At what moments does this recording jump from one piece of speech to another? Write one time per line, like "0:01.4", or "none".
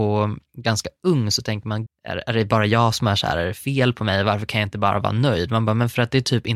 0:01.9

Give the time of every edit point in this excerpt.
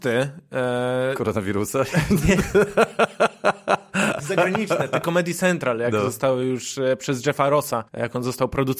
0:07.9

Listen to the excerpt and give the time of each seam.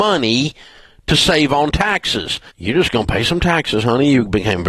0:02.5

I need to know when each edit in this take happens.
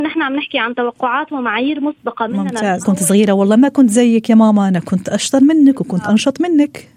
0:02.8

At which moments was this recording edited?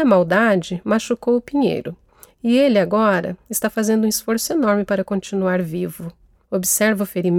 0:06.4

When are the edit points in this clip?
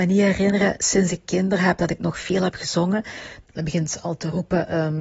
0:03.4

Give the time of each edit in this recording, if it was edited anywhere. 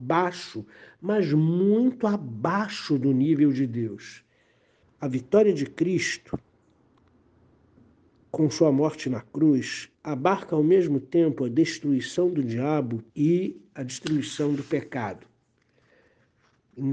0:04.8
0:09.9
0:13.1

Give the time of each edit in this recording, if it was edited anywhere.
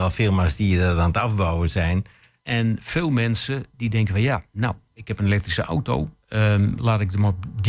0:02.4

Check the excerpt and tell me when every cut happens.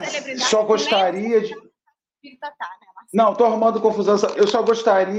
none

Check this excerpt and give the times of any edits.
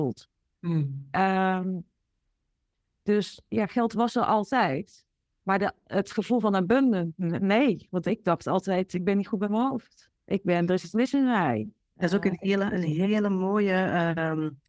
0:10.2

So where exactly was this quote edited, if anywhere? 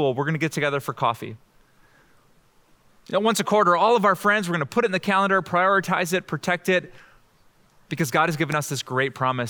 none

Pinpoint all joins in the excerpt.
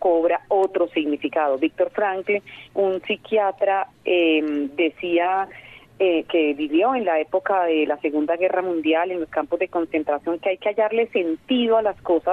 0:02.7

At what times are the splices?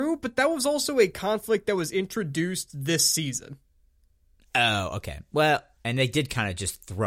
0:05.8

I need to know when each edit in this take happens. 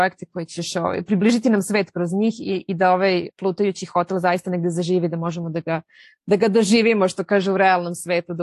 none

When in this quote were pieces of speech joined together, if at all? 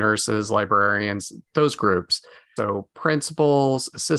0:02.6

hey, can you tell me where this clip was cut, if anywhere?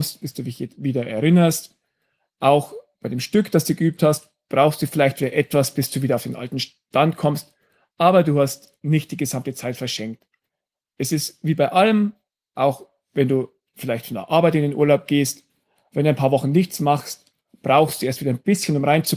none

